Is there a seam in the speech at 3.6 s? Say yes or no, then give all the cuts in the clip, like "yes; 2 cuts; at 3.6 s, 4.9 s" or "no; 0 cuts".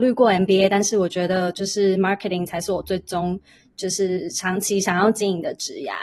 no; 0 cuts